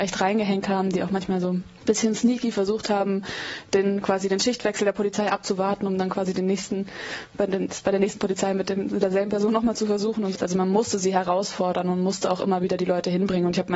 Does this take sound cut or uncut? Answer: cut